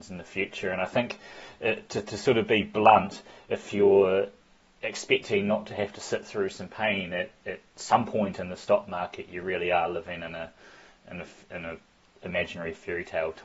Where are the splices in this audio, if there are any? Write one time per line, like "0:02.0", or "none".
none